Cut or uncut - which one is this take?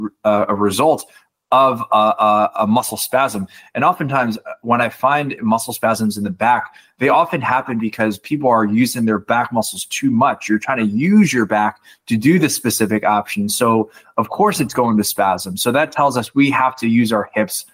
uncut